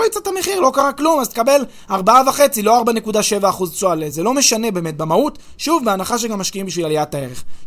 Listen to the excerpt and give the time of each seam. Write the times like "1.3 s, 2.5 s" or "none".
none